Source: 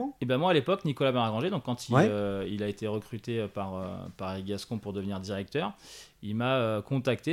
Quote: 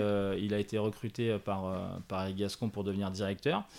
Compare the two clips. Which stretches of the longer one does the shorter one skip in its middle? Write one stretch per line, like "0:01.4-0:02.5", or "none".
none

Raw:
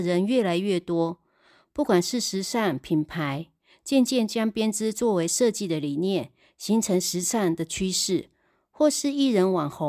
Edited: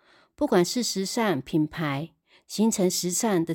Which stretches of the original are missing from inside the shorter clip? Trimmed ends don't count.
0:03.8-0:06.5

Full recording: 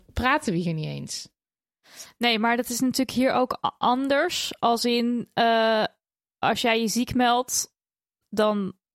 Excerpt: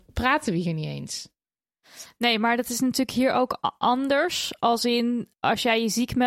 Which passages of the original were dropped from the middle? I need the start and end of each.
0:05.3-0:06.3

